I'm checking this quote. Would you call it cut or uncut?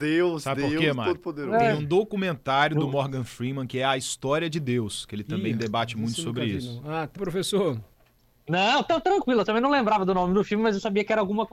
cut